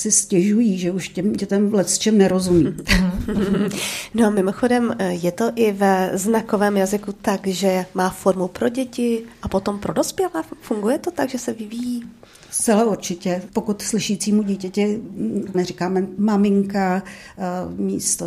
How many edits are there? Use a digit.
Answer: 2